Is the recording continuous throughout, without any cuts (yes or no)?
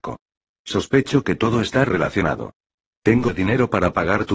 yes